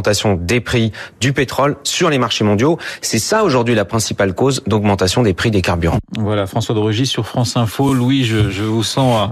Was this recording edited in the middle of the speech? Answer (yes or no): no